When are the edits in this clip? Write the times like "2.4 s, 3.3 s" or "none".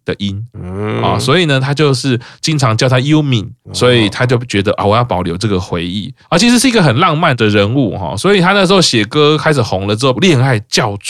6.2 s, 10.1 s